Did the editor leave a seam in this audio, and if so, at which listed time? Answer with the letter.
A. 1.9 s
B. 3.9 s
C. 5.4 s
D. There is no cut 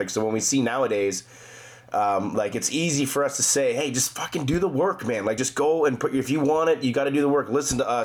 D